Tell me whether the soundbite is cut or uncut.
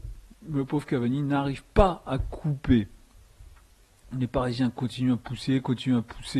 uncut